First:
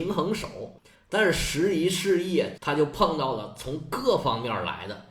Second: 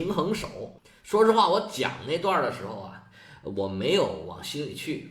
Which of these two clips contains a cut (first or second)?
first